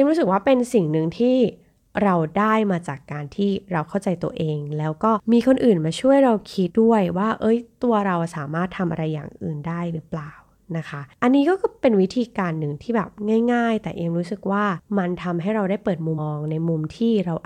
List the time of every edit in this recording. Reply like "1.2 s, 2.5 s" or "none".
6.7 s, 16.2 s